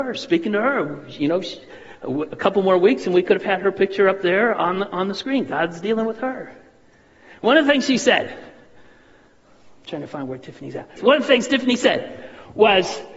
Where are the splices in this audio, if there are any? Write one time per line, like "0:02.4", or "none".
0:11.0